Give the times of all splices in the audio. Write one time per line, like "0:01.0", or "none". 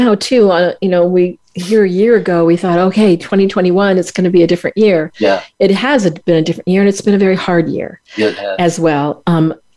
none